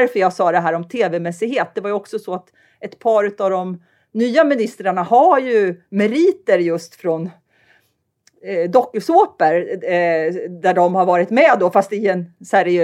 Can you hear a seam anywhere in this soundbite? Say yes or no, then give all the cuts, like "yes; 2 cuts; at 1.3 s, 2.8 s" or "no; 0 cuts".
no; 0 cuts